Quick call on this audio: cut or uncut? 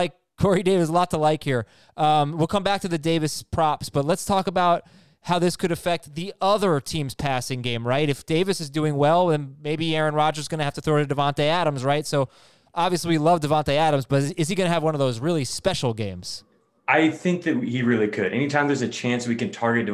uncut